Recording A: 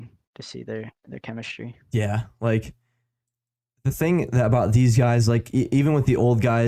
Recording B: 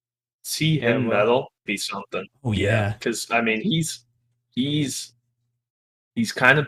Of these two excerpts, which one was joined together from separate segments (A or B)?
B